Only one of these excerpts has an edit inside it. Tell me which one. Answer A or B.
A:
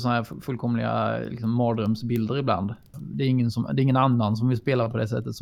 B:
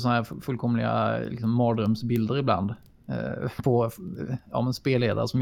A